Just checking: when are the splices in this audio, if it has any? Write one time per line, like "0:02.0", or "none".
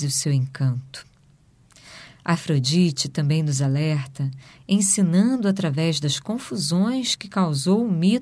0:02.0